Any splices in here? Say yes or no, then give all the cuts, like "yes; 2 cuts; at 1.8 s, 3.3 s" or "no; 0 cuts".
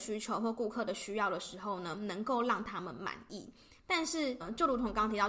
yes; 1 cut; at 3.8 s